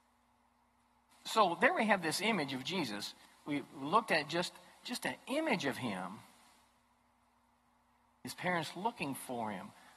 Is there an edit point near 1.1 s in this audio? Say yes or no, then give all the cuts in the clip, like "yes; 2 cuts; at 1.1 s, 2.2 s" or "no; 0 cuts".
yes; 1 cut; at 1.1 s